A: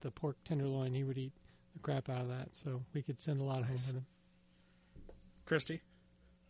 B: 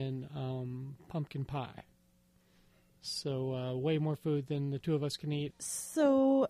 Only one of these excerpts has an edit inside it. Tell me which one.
B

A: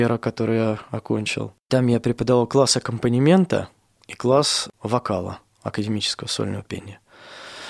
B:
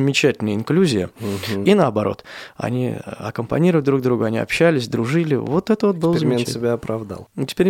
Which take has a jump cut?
B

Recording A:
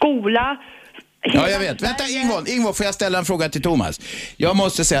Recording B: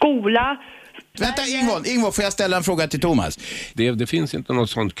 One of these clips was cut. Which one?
B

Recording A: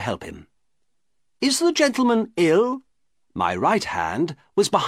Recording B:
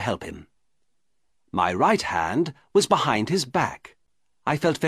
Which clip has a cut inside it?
A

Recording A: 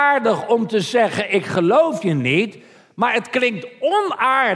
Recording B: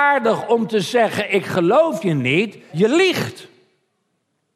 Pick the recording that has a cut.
B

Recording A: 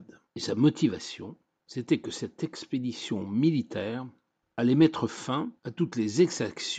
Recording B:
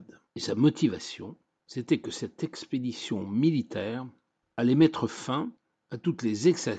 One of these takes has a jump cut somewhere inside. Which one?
A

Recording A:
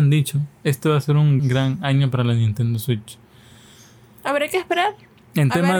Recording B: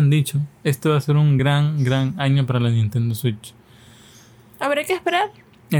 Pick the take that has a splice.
A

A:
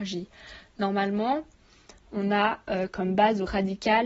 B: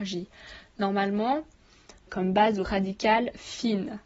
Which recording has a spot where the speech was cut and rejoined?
B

